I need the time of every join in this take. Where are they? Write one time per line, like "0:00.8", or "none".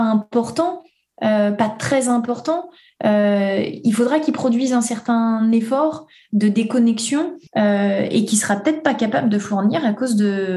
0:07.5